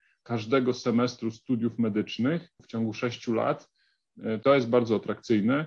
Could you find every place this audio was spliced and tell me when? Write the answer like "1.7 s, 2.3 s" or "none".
4.4 s